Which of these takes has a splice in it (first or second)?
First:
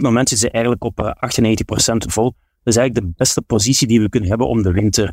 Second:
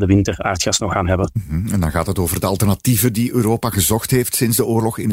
first